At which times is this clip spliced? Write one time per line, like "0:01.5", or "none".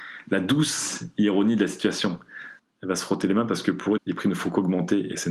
0:02.6
0:04.0